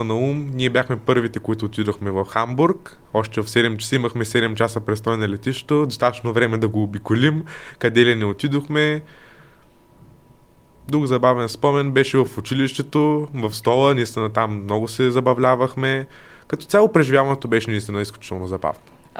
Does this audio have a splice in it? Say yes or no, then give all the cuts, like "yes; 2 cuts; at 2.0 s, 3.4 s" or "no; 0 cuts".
no; 0 cuts